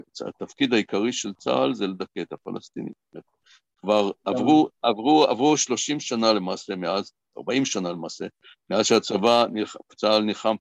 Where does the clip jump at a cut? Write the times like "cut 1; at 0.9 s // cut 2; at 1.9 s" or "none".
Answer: none